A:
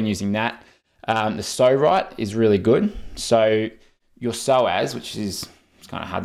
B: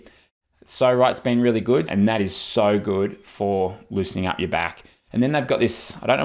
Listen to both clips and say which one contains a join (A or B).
B